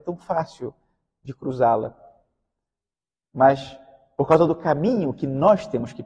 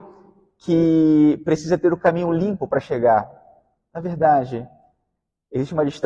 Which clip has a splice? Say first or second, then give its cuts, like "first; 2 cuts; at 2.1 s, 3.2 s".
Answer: first; 1 cut; at 3.2 s